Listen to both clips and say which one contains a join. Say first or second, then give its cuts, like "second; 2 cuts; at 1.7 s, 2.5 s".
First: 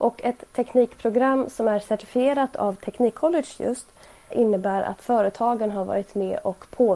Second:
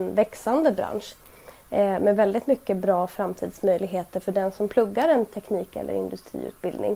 first; 1 cut; at 4.3 s